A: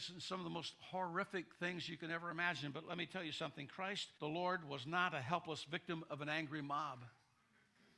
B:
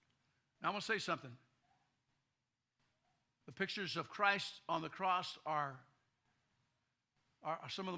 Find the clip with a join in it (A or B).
A